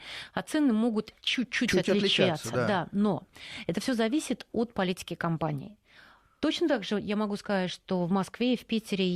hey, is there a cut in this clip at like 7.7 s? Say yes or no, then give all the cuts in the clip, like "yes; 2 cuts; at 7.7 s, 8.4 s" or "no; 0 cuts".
no; 1 cut; at 1.2 s